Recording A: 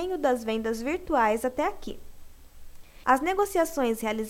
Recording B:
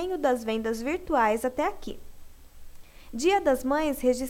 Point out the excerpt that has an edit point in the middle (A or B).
A